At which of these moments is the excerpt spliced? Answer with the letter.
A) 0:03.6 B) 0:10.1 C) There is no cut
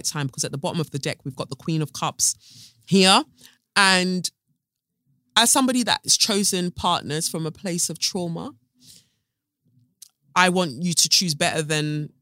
C